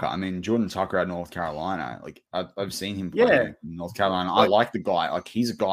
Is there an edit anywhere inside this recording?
no; 0 cuts

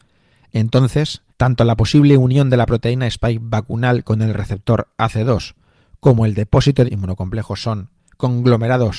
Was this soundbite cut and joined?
yes; 2 cuts; at 1.3 s, 6.9 s

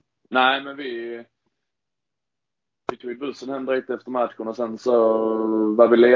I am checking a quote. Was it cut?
no; 0 cuts

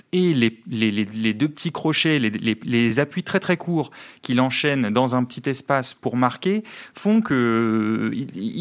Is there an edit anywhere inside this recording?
no; 0 cuts

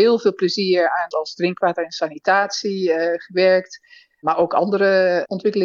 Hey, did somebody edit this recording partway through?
yes; 1 cut; at 1.1 s

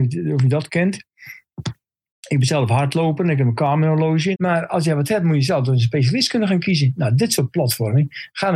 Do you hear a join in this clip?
yes; 1 cut; at 4.3 s

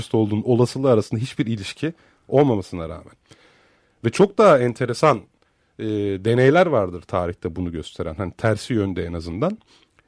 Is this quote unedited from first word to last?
yes; 0 cuts

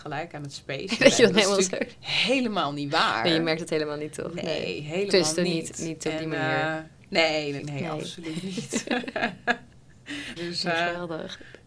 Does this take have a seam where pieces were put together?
yes; 2 cuts; at 7.6 s, 10.4 s

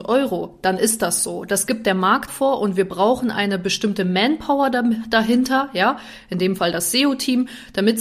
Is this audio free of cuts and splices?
no; 1 cut; at 2.3 s

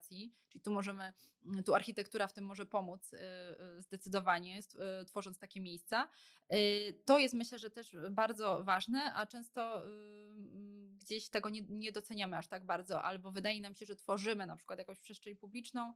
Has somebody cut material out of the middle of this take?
no; 0 cuts

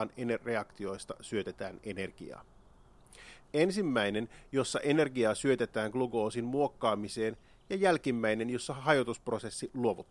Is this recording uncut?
no; 1 cut; at 3.4 s

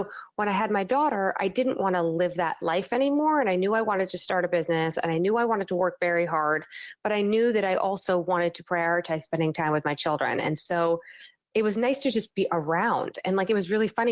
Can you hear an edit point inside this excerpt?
no; 0 cuts

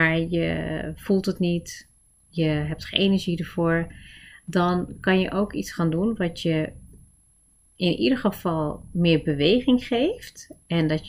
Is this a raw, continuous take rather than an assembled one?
yes; 0 cuts

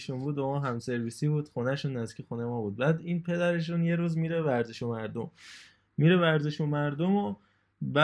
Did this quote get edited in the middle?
no; 0 cuts

